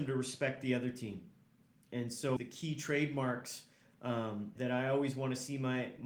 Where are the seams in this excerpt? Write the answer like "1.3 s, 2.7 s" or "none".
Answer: 2.4 s, 4.6 s